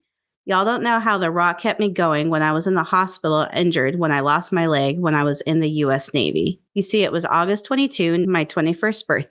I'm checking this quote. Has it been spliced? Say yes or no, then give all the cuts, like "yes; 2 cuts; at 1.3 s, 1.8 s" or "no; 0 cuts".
yes; 2 cuts; at 6.7 s, 8.2 s